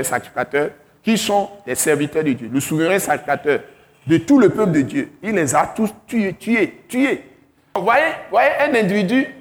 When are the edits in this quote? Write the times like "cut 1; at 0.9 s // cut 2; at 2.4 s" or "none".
none